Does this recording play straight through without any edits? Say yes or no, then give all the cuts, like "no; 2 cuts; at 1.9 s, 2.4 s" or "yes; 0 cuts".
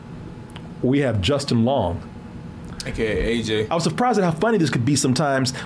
no; 1 cut; at 3.7 s